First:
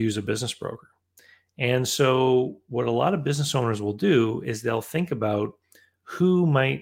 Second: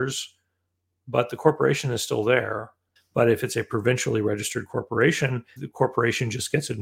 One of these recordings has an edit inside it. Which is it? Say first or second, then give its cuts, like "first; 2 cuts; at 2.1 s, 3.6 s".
second; 2 cuts; at 3.0 s, 5.6 s